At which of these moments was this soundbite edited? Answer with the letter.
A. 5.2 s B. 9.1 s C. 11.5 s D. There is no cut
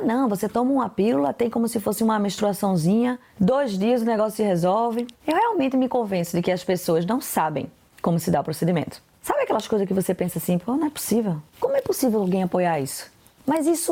B